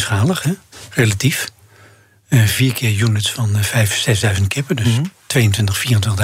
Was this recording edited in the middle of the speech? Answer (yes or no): no